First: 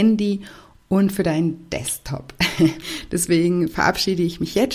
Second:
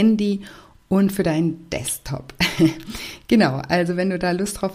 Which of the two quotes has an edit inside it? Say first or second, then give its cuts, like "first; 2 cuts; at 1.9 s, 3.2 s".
first; 1 cut; at 2.8 s